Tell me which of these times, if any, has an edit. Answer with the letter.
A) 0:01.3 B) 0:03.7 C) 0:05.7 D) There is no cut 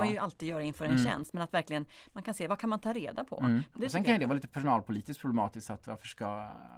B